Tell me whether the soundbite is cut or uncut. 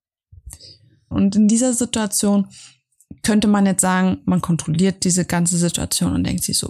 cut